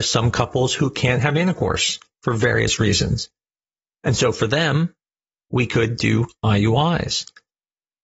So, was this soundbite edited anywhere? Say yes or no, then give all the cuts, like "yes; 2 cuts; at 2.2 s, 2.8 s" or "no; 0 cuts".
no; 0 cuts